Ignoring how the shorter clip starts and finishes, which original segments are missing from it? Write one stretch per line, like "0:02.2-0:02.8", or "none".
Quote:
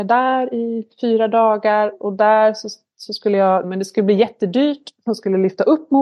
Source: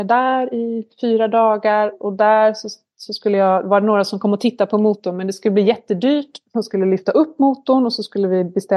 0:03.6-0:05.1